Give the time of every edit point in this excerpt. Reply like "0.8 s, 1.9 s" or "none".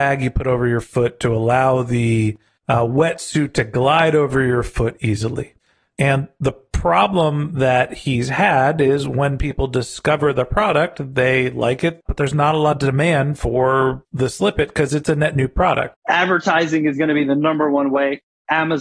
12.0 s, 15.9 s